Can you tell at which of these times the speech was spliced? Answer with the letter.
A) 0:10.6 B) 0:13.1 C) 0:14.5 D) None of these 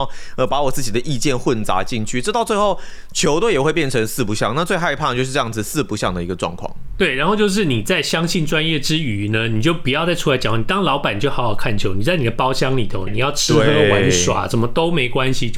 B